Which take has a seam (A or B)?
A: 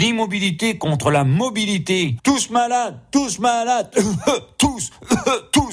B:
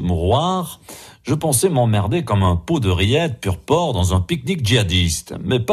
A